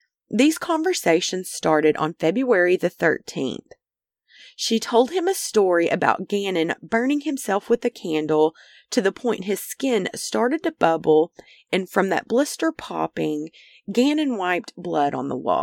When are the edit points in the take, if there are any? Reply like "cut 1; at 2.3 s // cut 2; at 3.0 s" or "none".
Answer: none